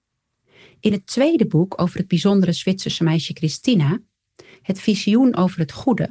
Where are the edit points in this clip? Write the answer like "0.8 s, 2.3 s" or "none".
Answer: none